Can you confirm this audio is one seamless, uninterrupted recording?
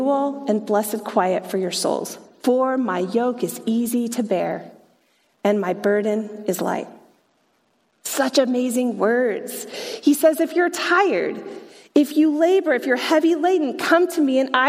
yes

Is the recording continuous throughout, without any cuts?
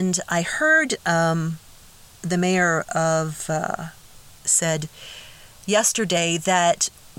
no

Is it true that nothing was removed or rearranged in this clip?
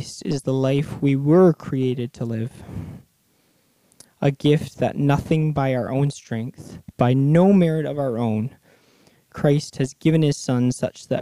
no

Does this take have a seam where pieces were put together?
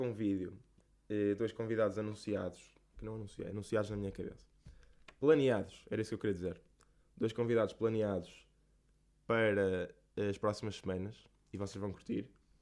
no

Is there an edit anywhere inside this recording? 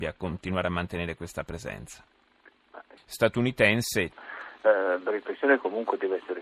yes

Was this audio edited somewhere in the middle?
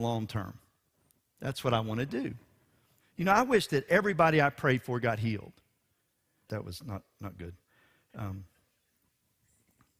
yes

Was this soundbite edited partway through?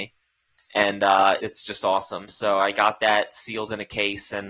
yes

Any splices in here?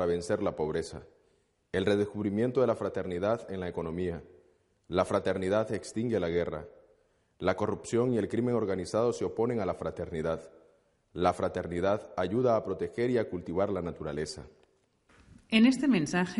no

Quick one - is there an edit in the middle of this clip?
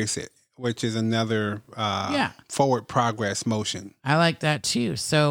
no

